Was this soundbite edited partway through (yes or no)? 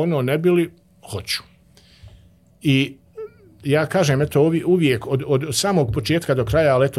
no